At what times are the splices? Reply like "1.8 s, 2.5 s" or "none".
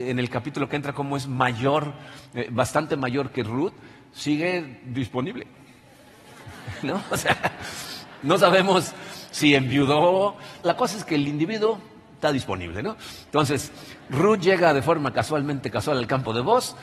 10.6 s